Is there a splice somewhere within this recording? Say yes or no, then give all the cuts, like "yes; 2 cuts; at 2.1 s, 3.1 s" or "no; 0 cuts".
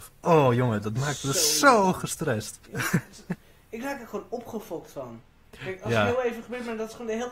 yes; 1 cut; at 2.6 s